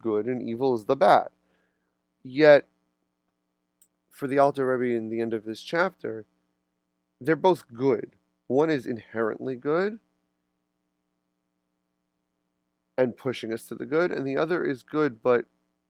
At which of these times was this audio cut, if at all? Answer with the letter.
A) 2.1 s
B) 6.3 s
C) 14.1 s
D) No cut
D